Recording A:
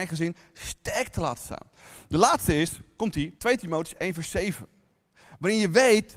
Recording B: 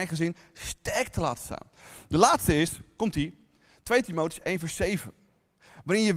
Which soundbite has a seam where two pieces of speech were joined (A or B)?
A